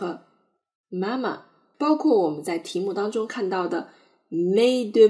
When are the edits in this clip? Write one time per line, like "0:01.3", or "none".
0:01.7